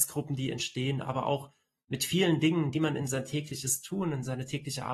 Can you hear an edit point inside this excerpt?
no; 0 cuts

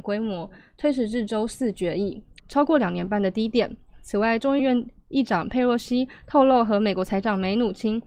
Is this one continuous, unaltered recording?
no; 2 cuts; at 2.4 s, 4.6 s

